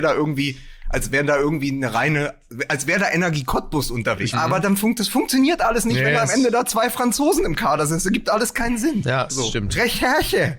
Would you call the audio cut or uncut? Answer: cut